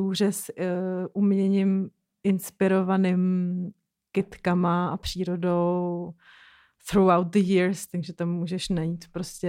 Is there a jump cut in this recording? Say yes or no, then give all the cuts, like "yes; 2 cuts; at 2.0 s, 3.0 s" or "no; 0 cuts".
no; 0 cuts